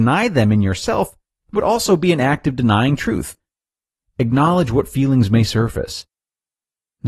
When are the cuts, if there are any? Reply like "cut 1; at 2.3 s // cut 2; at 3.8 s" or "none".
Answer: none